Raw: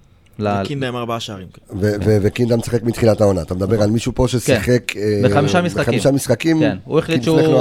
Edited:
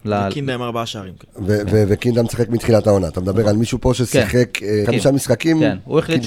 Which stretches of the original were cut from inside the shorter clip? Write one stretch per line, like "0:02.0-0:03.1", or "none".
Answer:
0:05.2-0:05.8